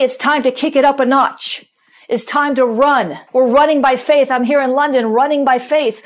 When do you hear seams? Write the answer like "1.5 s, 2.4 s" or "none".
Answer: 3.3 s

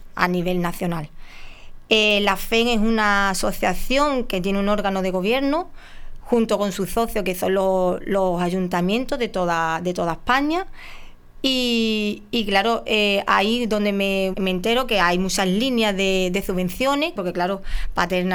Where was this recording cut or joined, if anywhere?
14.3 s, 17.2 s

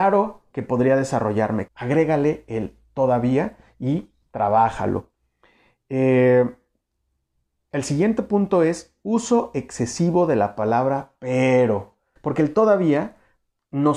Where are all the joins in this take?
1.7 s, 12.2 s

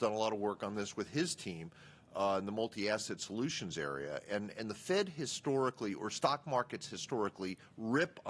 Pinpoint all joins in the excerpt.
none

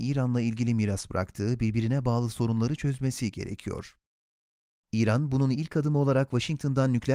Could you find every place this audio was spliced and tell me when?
none

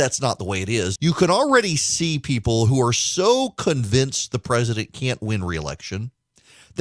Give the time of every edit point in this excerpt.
1.0 s

